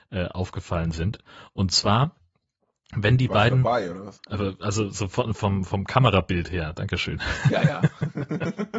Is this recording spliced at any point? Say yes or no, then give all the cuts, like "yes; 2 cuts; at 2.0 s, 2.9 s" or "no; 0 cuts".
no; 0 cuts